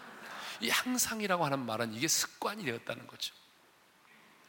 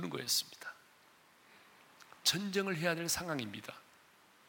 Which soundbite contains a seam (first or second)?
second